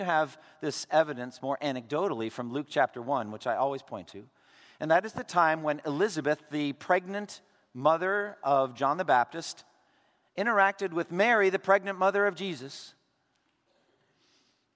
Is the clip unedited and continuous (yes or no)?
yes